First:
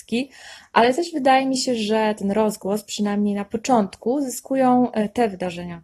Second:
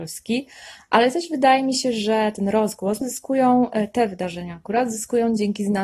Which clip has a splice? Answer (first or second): second